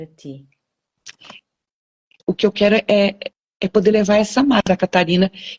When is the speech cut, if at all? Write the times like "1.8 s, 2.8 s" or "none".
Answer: 2.2 s